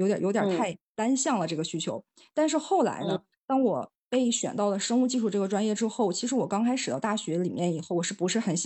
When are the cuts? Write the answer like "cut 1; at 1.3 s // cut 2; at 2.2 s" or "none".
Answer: none